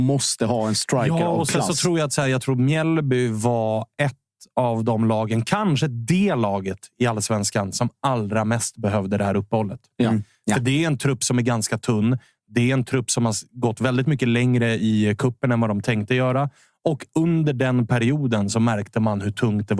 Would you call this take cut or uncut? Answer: uncut